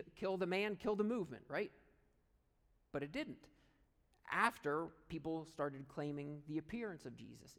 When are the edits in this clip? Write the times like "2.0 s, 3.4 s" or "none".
none